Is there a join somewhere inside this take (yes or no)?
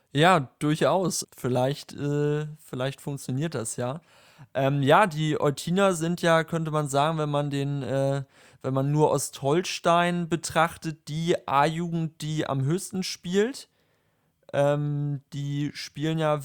yes